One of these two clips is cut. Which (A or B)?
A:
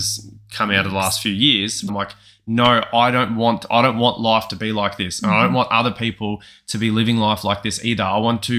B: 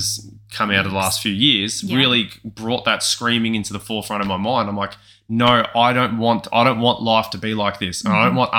A